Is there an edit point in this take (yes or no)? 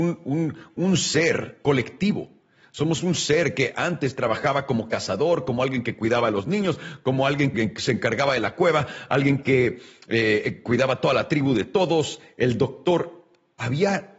yes